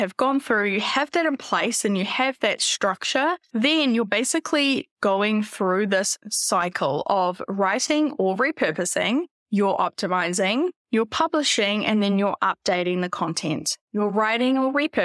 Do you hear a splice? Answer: no; 0 cuts

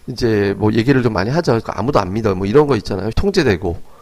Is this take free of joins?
no; 2 cuts; at 1.6 s, 3.1 s

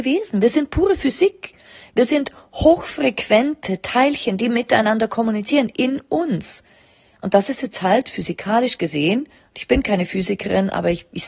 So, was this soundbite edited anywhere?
no; 0 cuts

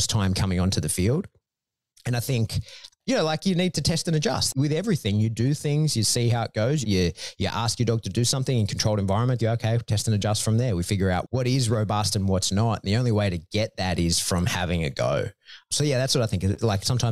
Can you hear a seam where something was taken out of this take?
yes; 2 cuts; at 6.8 s, 9.4 s

